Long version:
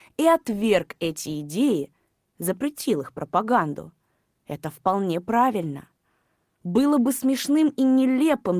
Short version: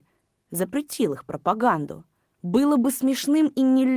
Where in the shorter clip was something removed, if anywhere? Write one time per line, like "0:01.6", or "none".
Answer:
0:02.2